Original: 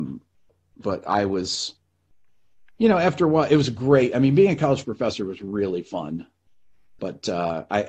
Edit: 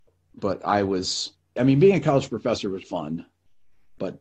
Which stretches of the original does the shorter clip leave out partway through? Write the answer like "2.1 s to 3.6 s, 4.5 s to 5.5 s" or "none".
2.0 s to 4.1 s, 5.4 s to 5.8 s